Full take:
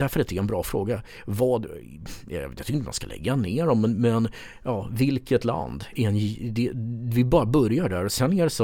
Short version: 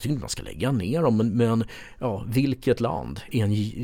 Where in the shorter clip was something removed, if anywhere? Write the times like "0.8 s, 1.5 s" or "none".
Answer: none